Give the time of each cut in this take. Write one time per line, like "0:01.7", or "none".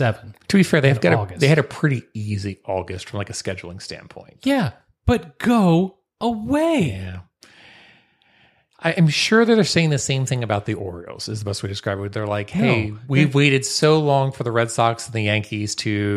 none